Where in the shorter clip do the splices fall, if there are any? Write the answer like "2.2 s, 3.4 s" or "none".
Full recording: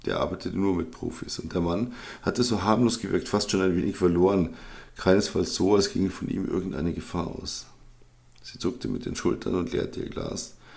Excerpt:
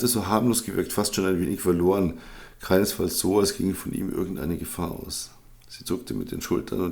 5.6 s